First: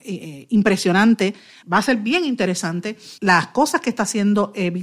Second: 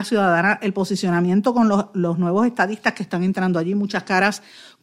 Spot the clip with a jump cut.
first; 2 cuts; at 1.6 s, 3.2 s

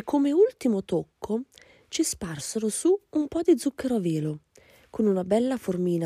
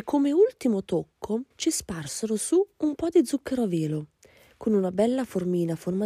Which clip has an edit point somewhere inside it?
second; 1 cut; at 1.5 s

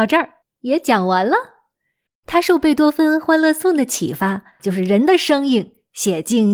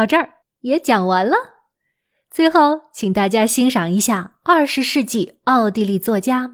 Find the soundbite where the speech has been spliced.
first; 2 cuts; at 2.1 s, 4.6 s

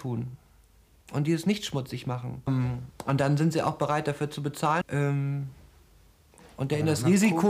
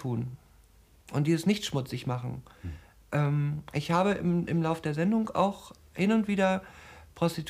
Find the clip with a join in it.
first; 2 cuts; at 2.5 s, 4.8 s

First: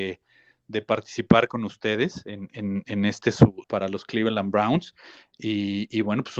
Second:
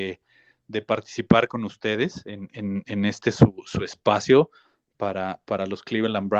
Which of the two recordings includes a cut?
first; 1 cut; at 3.6 s

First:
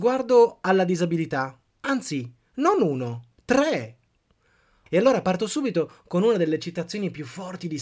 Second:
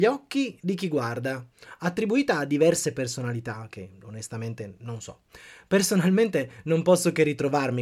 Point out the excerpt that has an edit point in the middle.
first; 1 cut; at 4.9 s

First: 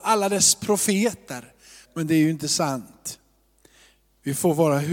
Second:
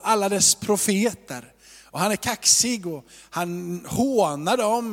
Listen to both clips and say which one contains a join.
first; 1 cut; at 1.8 s

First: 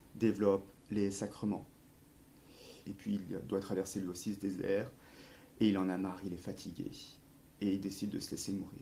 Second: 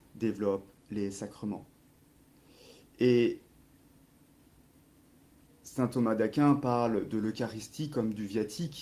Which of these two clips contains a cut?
first; 1 cut; at 2.8 s

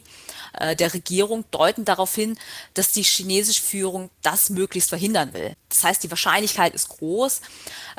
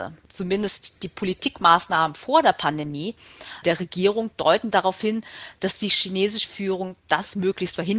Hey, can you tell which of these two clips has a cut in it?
second; 1 cut; at 3.6 s

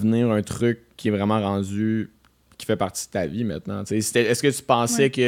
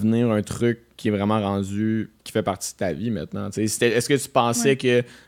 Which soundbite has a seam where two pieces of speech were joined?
second; 1 cut; at 2.2 s

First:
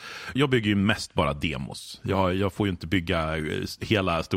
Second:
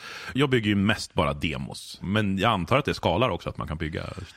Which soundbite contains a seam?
second; 1 cut; at 2.0 s

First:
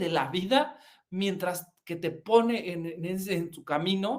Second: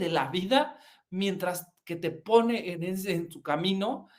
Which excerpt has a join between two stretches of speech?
second; 1 cut; at 2.7 s

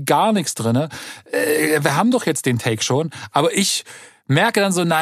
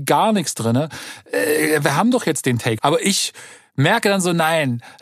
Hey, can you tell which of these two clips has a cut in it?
second; 1 cut; at 2.8 s

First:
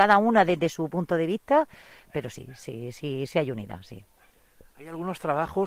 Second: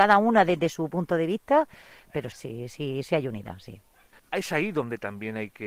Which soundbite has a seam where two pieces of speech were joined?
second; 2 cuts; at 2.3 s, 4.1 s

